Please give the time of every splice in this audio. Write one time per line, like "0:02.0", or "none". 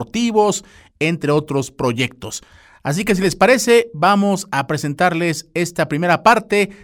none